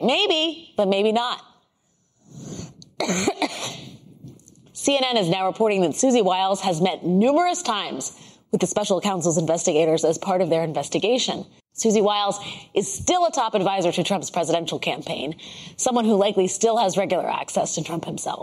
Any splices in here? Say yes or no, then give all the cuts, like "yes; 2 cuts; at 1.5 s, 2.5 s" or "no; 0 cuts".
yes; 1 cut; at 11.6 s